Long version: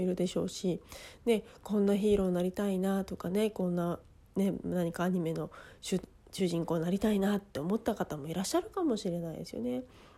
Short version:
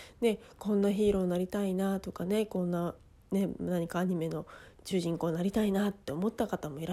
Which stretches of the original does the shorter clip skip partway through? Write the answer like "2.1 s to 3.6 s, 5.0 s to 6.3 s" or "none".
5.8 s to 6.2 s